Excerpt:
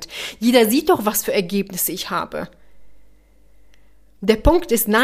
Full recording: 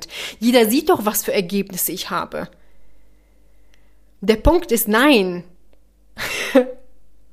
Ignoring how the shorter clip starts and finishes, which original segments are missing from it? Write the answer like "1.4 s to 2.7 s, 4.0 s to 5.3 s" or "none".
none